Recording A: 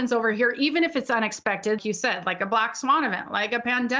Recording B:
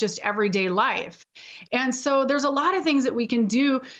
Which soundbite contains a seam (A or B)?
A